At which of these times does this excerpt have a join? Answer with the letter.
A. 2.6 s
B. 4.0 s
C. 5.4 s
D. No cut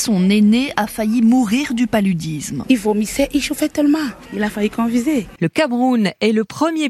C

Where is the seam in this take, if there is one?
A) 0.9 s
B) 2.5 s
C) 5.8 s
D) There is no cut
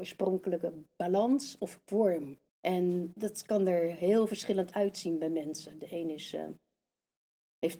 B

